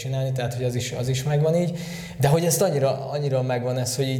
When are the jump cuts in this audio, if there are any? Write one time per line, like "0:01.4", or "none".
none